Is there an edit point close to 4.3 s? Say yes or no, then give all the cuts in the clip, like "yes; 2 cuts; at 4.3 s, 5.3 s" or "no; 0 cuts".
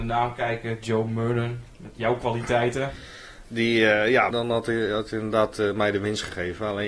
yes; 2 cuts; at 1.7 s, 4.3 s